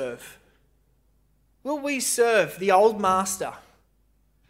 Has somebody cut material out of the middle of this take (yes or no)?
no